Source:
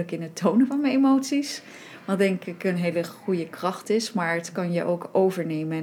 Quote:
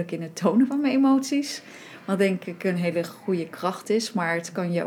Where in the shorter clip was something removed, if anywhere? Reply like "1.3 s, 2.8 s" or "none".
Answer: none